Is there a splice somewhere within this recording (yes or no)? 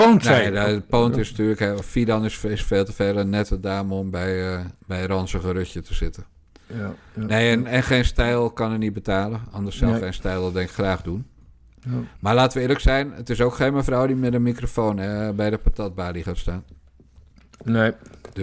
yes